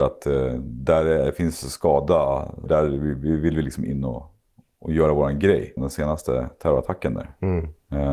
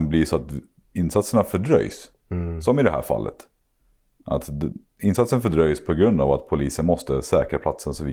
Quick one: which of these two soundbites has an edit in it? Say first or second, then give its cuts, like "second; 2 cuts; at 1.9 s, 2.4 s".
first; 2 cuts; at 2.7 s, 5.8 s